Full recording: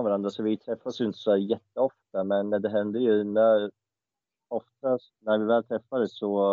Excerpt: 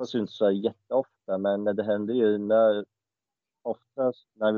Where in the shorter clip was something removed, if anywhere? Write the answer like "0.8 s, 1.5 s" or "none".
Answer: none